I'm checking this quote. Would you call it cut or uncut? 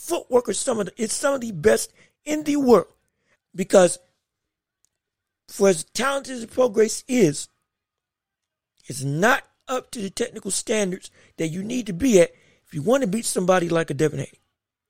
cut